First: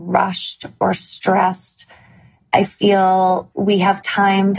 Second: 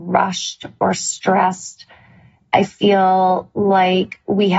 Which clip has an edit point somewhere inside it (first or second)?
first